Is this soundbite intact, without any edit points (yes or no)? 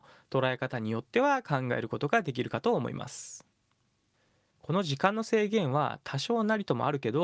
no